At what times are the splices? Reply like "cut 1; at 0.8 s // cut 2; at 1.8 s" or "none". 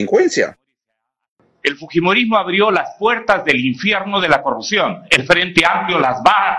none